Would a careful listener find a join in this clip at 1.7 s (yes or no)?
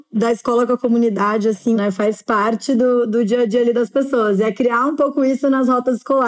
yes